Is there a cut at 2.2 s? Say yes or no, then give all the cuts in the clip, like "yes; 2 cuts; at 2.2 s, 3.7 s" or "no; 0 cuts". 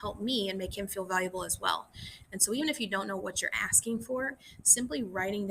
yes; 1 cut; at 2.2 s